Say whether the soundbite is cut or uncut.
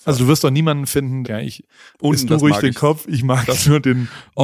cut